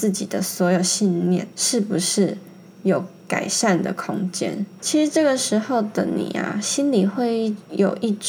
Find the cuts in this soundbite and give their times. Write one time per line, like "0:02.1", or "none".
0:01.5
0:04.8